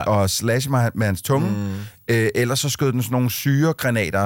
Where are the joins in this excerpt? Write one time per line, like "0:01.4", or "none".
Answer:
none